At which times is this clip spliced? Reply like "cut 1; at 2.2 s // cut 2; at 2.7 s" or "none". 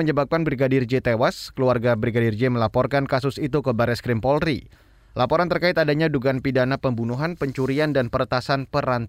none